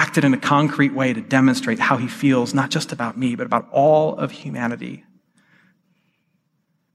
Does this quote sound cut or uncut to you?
uncut